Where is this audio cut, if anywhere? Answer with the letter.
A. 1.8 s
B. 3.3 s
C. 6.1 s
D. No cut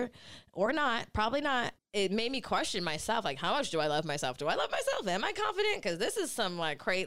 A